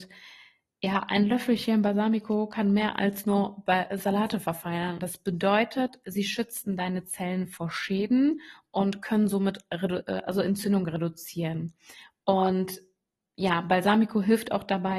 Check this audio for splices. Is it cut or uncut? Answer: cut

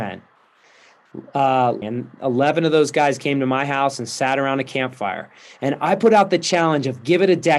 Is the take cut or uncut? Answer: cut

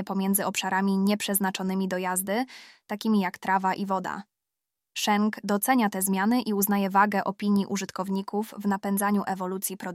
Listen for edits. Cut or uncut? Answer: uncut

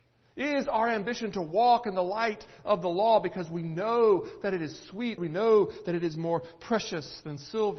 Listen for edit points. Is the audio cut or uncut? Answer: cut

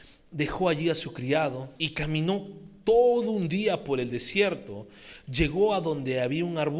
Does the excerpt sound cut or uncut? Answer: cut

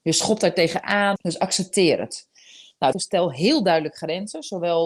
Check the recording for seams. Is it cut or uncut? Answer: cut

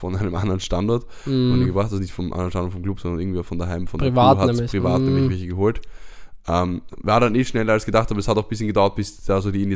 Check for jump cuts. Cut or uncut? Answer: uncut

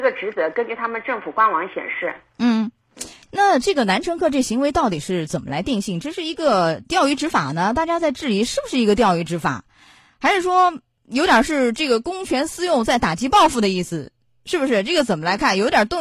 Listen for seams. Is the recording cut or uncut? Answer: uncut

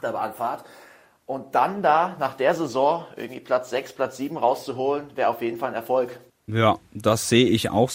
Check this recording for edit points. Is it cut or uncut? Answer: uncut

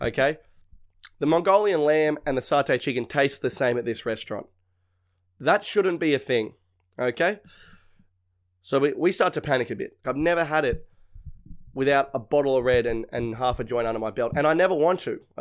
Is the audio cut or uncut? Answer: cut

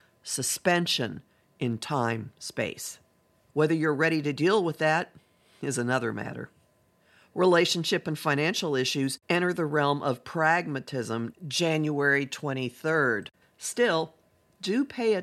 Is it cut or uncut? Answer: cut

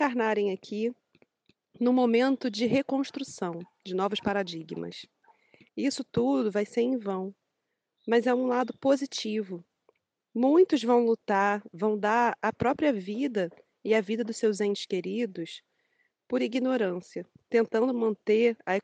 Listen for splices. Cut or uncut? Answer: cut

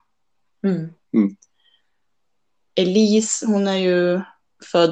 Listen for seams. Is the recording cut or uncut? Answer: cut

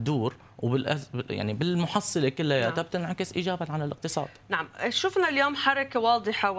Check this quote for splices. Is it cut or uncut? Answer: uncut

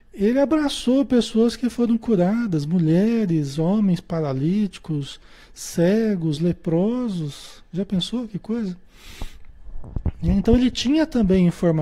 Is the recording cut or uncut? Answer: uncut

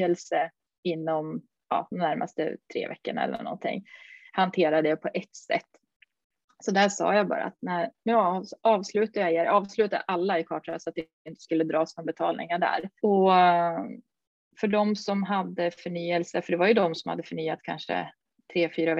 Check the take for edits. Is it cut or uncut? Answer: cut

